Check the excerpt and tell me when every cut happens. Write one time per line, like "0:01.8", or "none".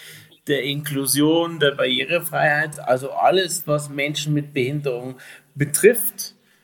none

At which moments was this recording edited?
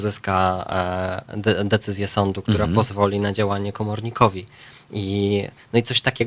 none

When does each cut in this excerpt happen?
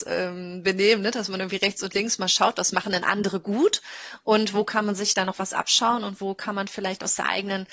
none

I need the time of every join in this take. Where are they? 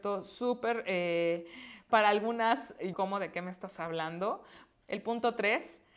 0:01.9
0:02.9
0:04.7

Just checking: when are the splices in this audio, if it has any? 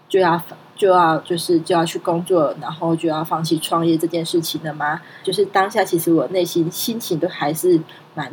0:05.2

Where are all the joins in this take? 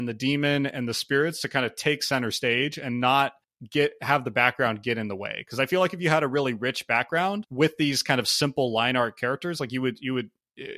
none

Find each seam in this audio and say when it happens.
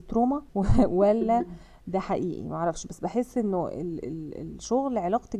none

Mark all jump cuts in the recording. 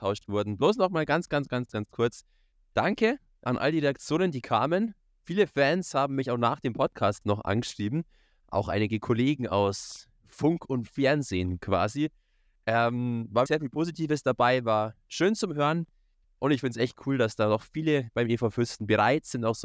0:13.5
0:16.2

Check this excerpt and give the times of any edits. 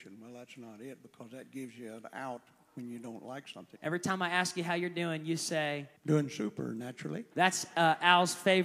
0:03.8
0:06.0
0:07.3

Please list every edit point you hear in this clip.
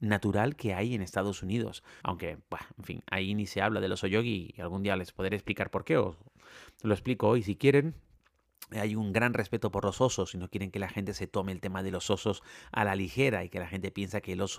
0:02.0

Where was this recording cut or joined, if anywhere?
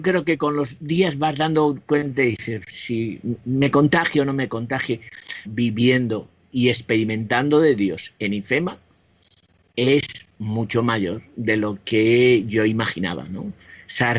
0:02.7
0:05.5

